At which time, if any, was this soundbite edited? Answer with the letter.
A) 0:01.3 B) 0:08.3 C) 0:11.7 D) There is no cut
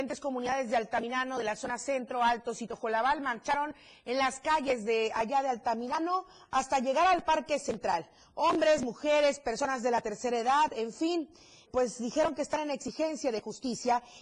C